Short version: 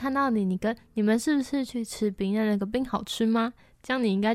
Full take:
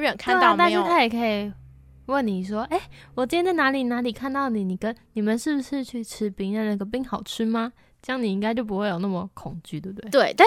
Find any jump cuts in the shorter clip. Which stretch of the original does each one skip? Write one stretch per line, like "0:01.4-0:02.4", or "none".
none

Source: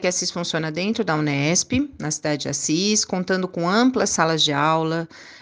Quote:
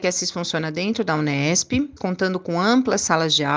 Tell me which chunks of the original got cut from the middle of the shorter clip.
0:02.0-0:03.1

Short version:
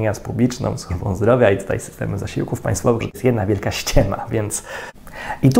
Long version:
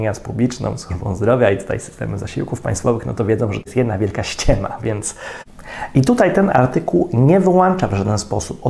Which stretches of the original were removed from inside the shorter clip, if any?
0:03.0-0:03.5

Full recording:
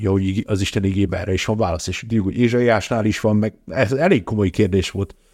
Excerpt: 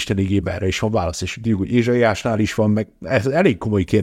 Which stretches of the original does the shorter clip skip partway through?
none

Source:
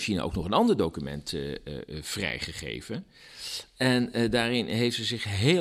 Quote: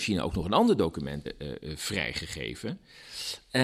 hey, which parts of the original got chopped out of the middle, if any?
0:01.3-0:01.5

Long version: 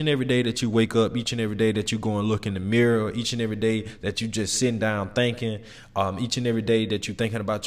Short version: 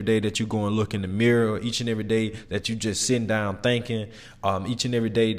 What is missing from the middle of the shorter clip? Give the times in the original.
none

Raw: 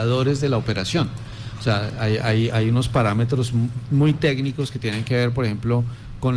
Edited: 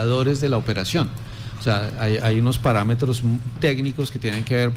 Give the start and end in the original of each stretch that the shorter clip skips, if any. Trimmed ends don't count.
0:02.2-0:02.5
0:03.9-0:04.2

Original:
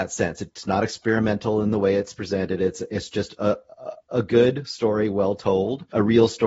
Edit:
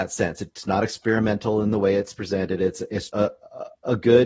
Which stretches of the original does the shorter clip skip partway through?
0:03.1-0:03.4

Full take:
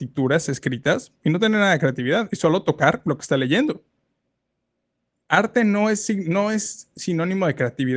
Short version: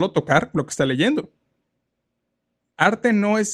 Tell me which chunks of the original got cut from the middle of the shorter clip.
none

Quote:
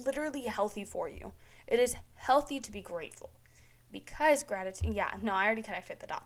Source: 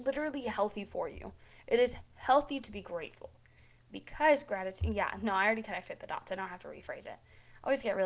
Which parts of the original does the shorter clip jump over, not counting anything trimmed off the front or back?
none

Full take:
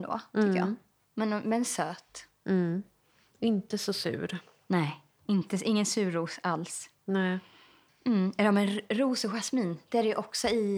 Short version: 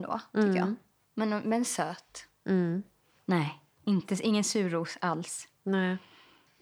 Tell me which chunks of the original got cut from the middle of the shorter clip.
0:03.2-0:04.6

